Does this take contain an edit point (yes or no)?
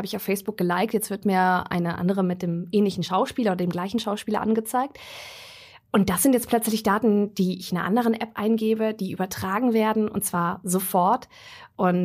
no